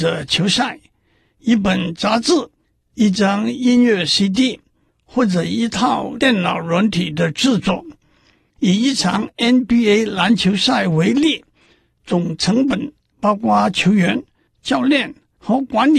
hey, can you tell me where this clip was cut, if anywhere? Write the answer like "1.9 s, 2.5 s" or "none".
none